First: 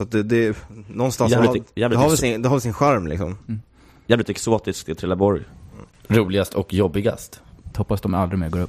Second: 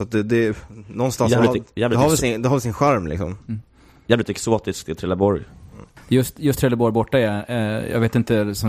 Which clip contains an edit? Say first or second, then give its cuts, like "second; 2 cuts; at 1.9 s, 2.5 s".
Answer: first; 2 cuts; at 5.9 s, 7.7 s